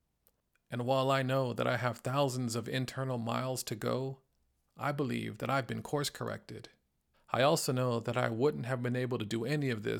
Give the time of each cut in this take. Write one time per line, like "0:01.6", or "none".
0:07.1